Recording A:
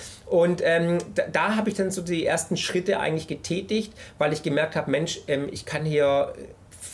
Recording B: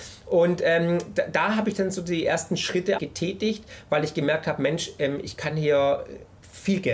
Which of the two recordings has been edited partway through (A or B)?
B